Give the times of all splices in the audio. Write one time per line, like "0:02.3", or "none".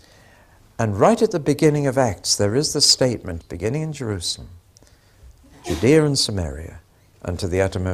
0:03.4